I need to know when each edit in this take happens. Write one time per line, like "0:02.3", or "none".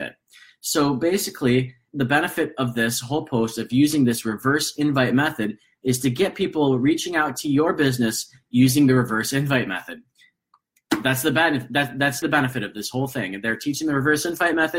0:01.9
0:12.2